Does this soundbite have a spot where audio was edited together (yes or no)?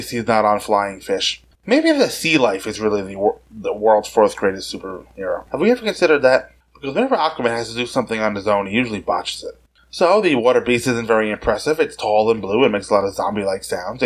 yes